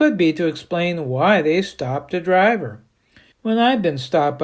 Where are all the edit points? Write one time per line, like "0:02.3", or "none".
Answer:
0:03.3